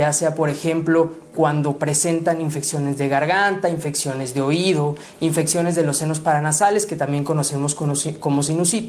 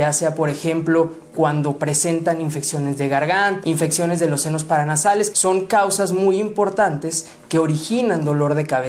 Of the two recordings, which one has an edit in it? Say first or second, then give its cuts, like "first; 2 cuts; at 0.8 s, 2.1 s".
second; 2 cuts; at 3.6 s, 5.3 s